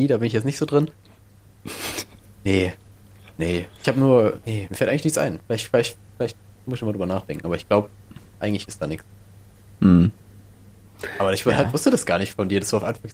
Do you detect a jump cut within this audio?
yes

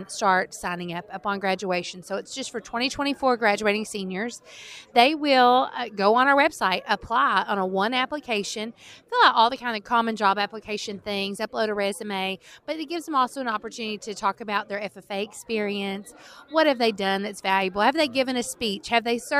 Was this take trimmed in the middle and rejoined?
no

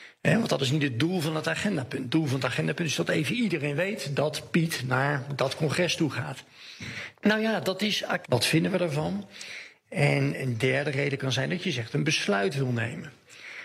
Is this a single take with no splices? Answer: no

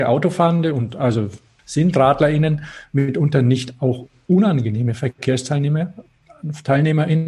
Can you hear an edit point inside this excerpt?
yes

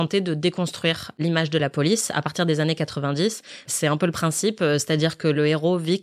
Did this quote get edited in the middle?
yes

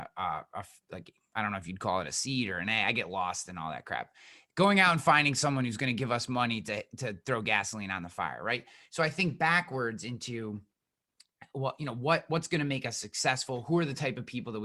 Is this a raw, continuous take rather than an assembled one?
yes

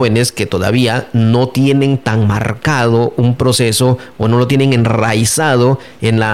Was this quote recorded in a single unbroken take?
yes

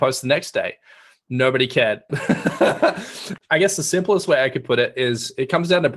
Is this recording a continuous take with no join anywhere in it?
no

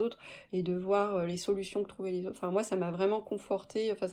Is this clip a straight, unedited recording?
yes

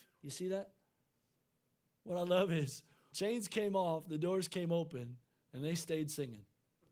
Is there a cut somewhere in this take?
yes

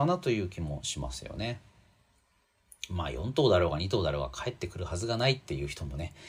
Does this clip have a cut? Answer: no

